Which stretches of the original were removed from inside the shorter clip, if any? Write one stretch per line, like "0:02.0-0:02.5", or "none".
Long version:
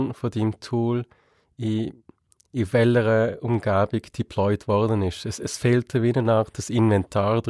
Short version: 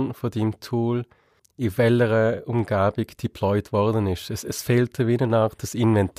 0:01.4-0:02.3

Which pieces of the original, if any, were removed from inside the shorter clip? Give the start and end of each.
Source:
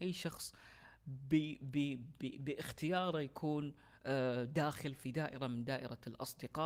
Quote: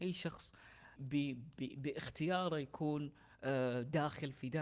0:01.0-0:01.6

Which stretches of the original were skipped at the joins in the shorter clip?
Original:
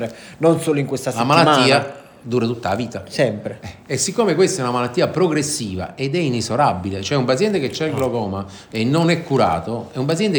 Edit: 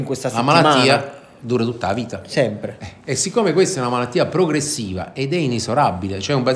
none

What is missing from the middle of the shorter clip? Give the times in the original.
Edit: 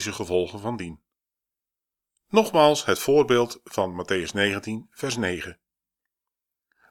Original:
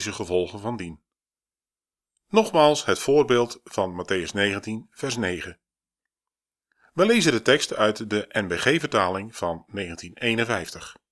none

